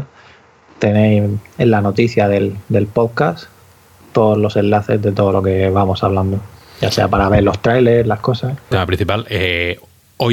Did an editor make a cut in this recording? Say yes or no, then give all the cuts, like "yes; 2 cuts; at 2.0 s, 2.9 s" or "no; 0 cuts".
yes; 1 cut; at 8.7 s